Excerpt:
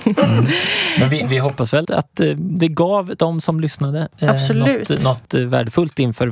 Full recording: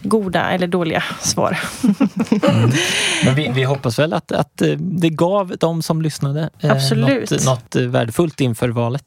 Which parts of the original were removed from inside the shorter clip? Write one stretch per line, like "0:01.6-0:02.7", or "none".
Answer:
0:04.1-0:04.3